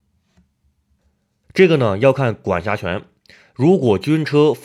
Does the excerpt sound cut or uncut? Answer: cut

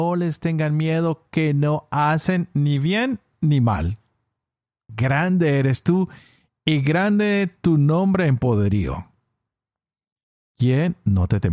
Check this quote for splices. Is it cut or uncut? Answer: cut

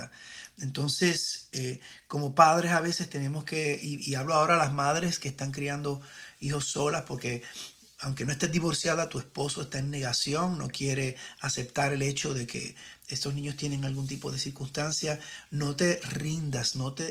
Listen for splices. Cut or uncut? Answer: uncut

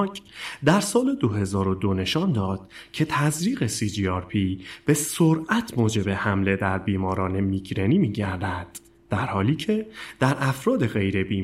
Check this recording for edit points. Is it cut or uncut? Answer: uncut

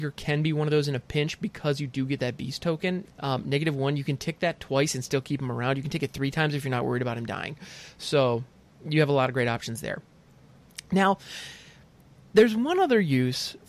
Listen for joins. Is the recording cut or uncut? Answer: cut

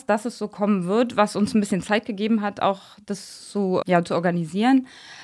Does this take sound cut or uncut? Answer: cut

